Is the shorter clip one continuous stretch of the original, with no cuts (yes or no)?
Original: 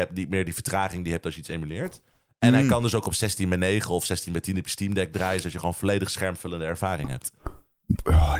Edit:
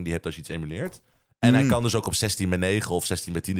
yes